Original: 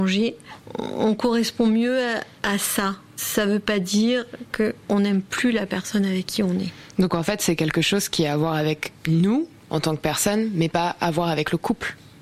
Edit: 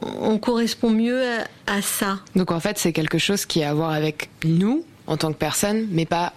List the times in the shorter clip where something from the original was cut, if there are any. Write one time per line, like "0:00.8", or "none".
0:02.3

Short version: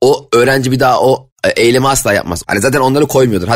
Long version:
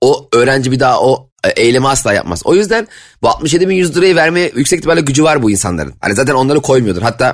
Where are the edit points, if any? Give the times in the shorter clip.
0:02.4

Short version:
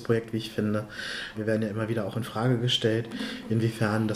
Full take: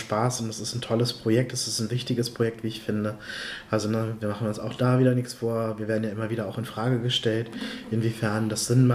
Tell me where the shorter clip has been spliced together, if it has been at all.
0:01.3

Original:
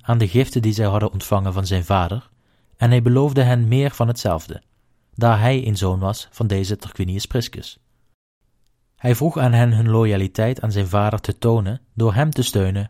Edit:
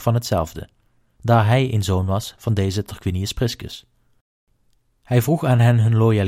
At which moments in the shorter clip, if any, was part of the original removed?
none

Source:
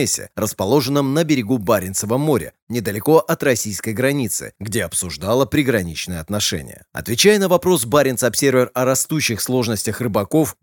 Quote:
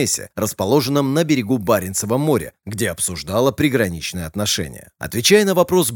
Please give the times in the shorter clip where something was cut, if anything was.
0:02.6

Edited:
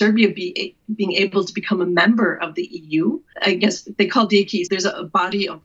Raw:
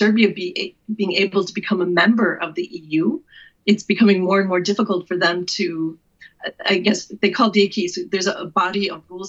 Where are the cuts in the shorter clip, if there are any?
0:03.3
0:04.7

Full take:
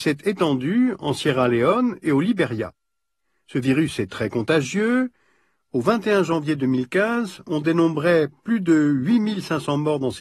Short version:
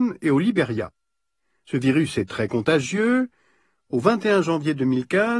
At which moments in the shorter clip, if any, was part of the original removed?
none

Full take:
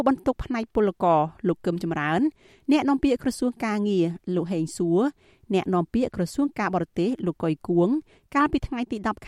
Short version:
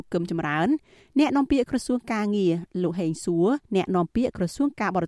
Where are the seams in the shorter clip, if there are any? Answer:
0:03.6

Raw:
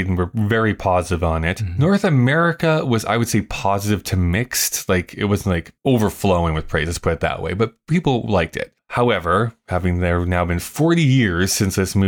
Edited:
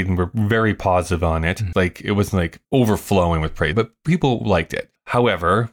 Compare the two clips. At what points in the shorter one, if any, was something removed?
0:01.7
0:03.7

